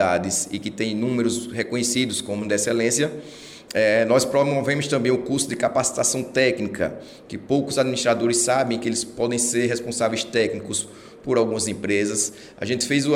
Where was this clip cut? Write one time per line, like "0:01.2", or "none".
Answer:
none